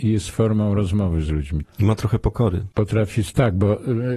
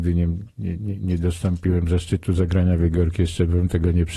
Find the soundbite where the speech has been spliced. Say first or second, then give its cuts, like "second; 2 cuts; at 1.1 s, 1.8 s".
first; 2 cuts; at 1.6 s, 2.7 s